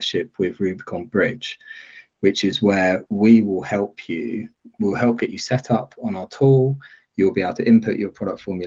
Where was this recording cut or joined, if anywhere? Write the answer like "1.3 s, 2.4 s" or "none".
none